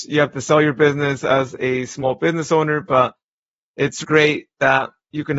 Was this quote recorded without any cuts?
no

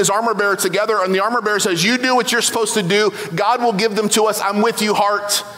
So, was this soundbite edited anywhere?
no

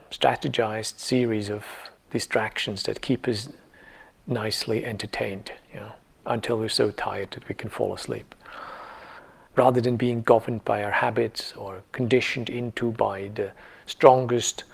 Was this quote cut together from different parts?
yes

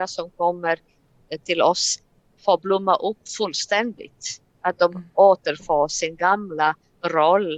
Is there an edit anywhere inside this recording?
no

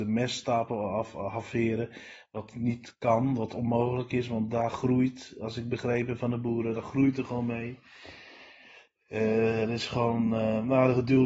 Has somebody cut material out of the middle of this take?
no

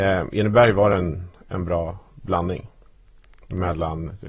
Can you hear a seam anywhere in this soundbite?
no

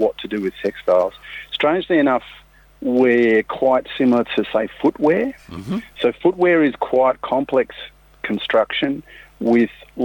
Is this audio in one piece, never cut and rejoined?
yes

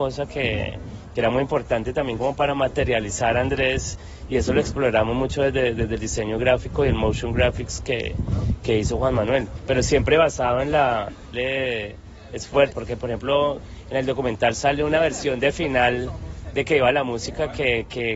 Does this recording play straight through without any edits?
no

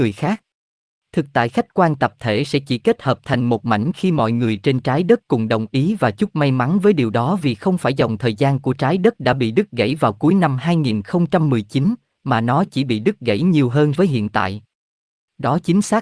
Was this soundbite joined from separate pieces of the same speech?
yes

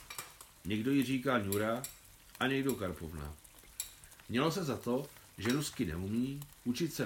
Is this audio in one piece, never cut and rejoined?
yes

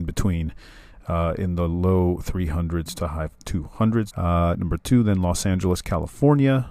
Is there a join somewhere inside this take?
yes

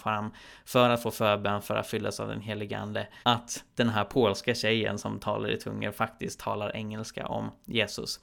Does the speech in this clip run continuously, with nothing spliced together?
no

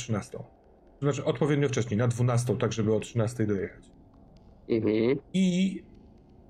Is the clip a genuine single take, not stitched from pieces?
no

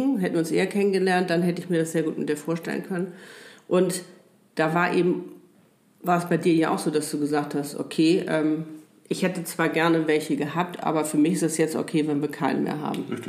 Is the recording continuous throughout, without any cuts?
yes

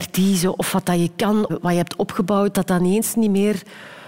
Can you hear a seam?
yes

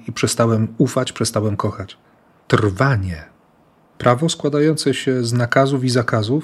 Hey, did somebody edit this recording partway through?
yes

